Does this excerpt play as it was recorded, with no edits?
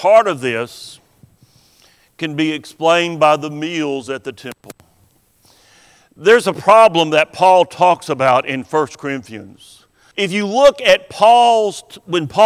no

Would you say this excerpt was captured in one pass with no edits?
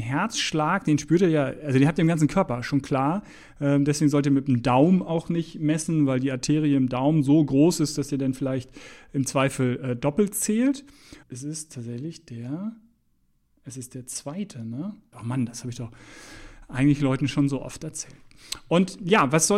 no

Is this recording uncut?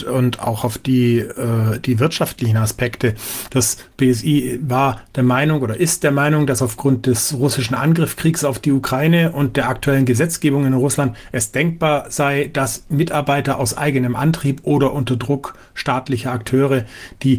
no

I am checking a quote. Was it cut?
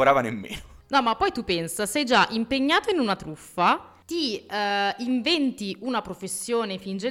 no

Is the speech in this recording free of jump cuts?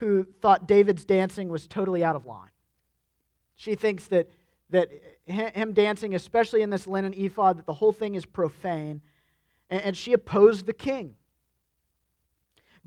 yes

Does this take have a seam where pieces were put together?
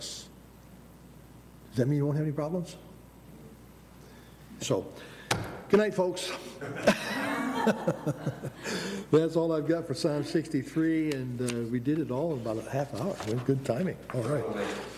yes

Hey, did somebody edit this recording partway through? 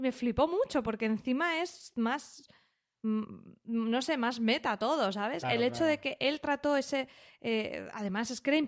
no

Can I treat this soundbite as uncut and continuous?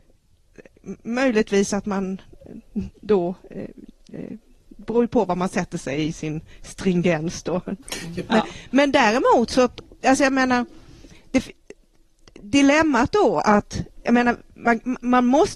no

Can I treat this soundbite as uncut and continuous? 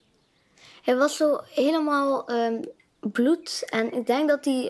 no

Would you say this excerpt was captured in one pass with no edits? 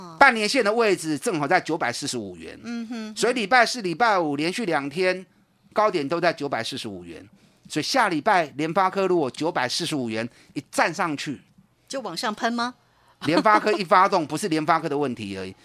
yes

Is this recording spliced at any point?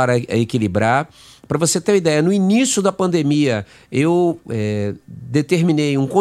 yes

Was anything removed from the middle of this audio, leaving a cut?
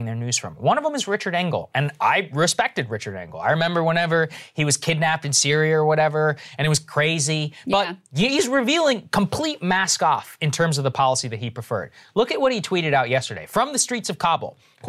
yes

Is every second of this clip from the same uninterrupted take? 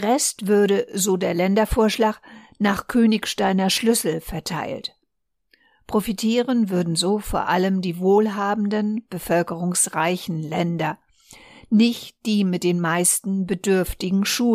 yes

